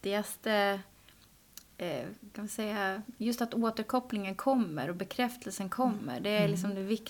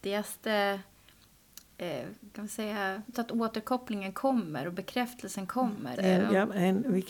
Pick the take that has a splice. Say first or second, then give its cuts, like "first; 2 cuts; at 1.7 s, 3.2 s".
second; 2 cuts; at 3.1 s, 6.0 s